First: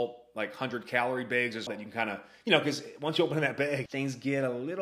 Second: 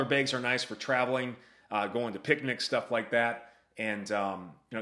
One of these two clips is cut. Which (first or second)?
first